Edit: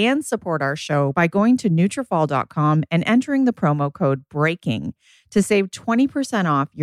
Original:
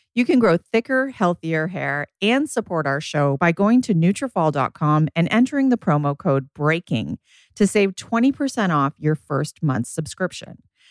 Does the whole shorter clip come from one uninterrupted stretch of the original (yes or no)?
yes